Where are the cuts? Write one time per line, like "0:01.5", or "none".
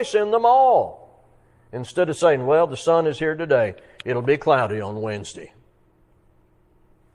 none